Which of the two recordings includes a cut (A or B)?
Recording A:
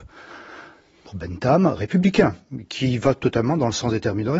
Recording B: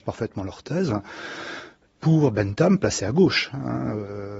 A